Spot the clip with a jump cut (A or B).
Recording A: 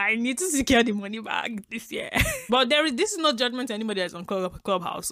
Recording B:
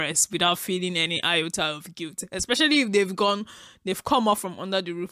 A